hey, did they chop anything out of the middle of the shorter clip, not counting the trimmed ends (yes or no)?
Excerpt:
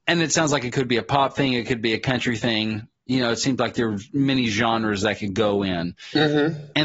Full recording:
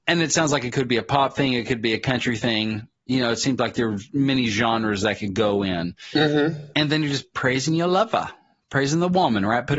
no